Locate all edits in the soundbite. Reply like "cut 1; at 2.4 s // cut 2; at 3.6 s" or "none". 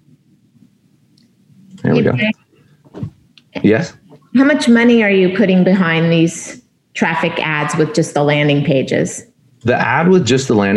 none